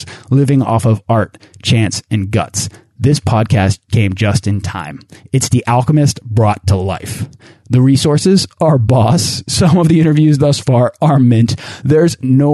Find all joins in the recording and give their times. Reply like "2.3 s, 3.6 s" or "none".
none